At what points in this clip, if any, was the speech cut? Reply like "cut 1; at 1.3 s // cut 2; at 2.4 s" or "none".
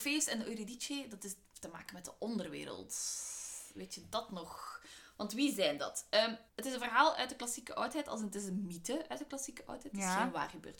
cut 1; at 6.5 s